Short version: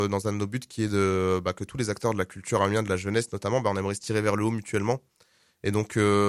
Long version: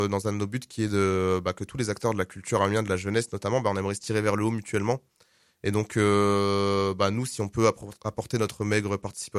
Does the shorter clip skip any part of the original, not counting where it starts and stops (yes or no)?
no